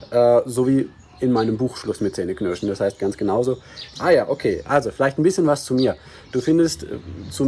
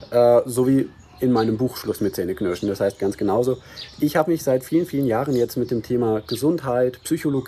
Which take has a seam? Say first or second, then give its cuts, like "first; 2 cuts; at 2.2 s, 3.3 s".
first; 1 cut; at 4.0 s